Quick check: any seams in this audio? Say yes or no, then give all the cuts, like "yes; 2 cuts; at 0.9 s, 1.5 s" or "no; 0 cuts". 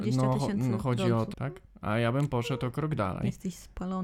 yes; 1 cut; at 1.3 s